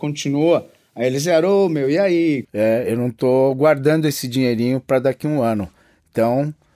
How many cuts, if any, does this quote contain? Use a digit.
1